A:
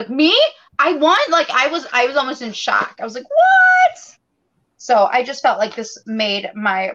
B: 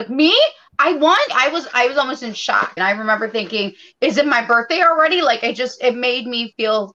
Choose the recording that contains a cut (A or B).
B